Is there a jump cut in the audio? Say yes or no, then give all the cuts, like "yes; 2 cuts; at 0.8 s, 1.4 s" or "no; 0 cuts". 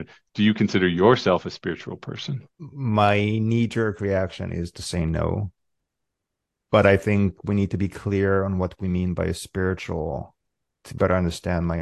yes; 1 cut; at 2.5 s